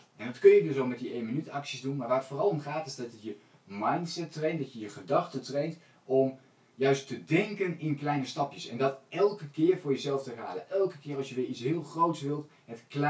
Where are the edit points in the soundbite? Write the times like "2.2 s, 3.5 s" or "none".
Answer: none